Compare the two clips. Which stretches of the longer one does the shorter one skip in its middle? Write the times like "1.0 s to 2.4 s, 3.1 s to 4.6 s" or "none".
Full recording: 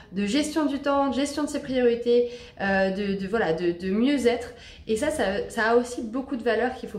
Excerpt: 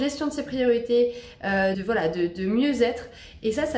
2.9 s to 3.2 s